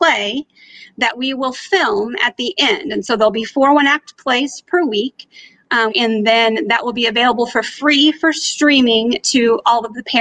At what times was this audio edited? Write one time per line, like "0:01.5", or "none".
0:05.9